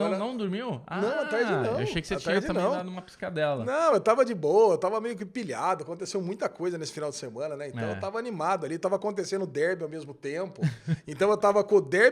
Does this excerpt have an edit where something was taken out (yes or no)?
no